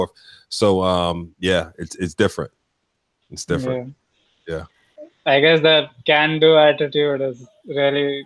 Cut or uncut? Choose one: uncut